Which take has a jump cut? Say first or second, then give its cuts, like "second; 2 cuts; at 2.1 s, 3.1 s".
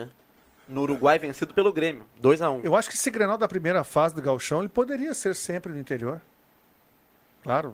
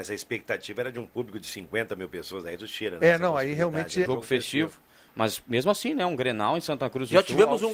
second; 1 cut; at 4.1 s